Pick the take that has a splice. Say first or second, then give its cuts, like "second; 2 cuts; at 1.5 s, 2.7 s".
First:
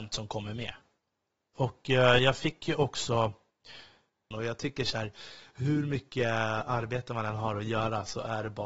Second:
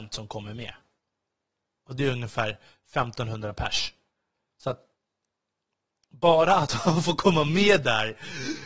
first; 2 cuts; at 1.5 s, 4.3 s